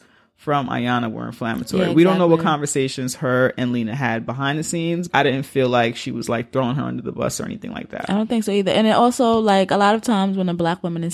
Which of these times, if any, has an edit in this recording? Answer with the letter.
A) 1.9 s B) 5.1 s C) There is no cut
B